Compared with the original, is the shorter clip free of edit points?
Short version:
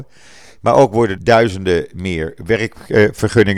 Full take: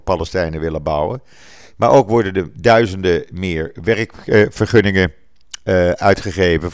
no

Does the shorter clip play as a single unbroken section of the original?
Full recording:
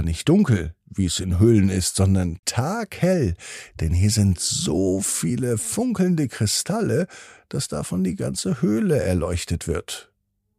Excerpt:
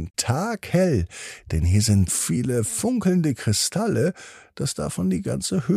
no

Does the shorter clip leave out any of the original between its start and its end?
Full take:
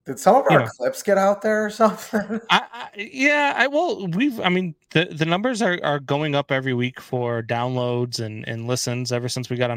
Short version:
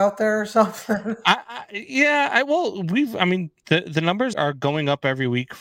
yes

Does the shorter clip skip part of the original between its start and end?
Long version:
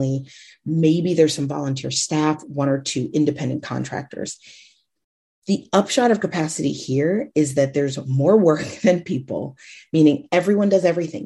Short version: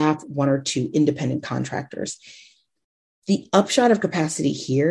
no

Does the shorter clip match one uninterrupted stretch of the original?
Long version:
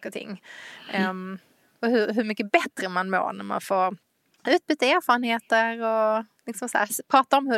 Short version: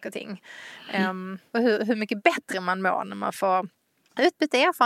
no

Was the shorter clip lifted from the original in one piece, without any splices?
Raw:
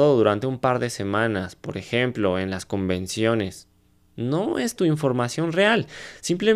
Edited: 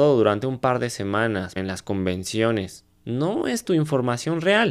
no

